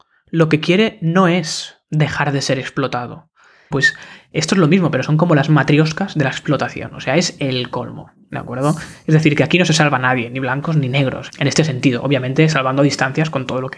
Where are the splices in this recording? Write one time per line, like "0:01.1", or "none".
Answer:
0:03.7
0:11.3